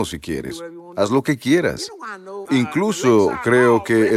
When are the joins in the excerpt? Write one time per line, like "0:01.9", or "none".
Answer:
0:02.5

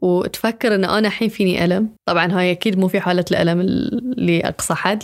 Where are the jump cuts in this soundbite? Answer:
0:02.0

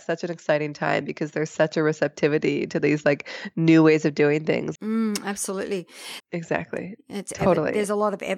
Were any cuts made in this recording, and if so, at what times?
0:04.8
0:06.2

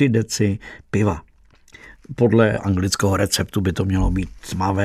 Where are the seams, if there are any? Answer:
none

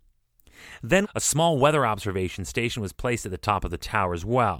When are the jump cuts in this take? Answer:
0:01.0

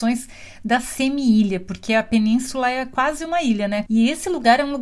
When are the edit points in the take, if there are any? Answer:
0:03.9

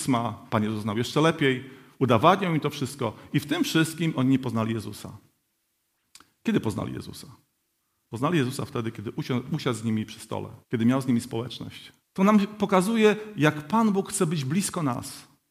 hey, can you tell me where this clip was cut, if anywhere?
0:10.6
0:12.0

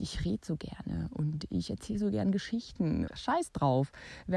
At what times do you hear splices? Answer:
0:03.1

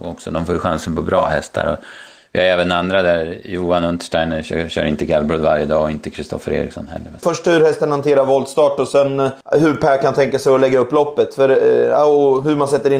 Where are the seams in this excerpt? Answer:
0:07.2
0:09.4

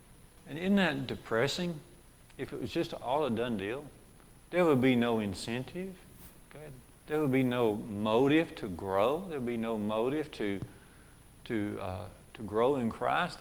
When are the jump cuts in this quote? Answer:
0:06.4

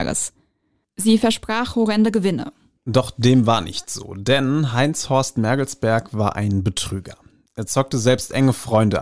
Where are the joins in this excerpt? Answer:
0:02.8

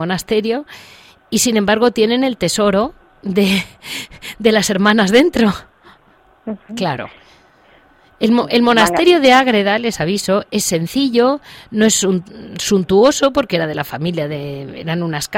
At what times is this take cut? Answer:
0:06.7

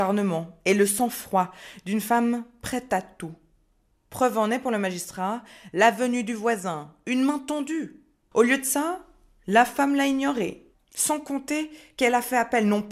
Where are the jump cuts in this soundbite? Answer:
0:08.3

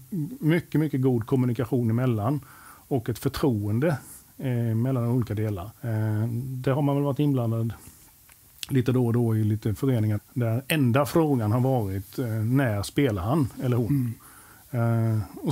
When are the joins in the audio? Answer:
0:05.8
0:10.1

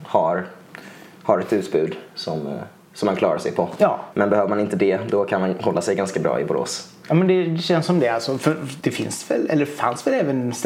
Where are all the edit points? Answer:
0:04.1
0:08.8

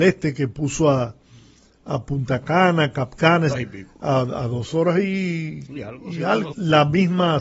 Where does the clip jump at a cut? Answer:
0:03.5
0:06.5

